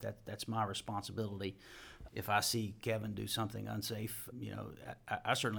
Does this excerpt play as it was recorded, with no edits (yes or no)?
no